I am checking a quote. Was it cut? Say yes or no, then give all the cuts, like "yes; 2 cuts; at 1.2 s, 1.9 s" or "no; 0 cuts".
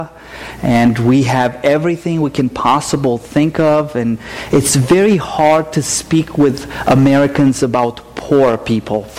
no; 0 cuts